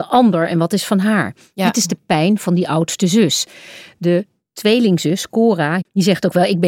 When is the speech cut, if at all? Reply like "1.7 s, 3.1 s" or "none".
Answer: none